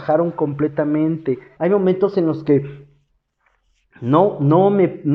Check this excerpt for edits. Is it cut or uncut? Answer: cut